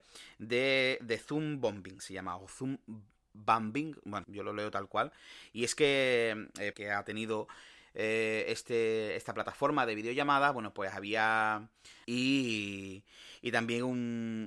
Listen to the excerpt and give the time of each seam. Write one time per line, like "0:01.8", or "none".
0:04.2
0:06.7
0:12.0